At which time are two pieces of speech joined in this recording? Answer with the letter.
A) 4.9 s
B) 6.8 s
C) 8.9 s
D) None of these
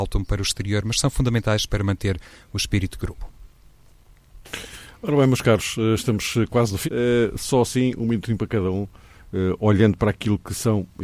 B